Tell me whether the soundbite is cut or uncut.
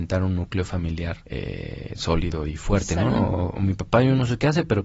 cut